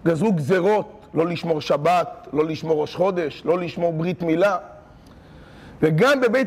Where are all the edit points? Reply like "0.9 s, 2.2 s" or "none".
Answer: none